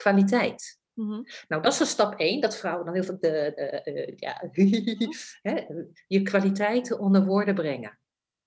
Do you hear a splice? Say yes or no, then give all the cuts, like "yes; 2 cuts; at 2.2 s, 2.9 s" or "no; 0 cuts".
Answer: no; 0 cuts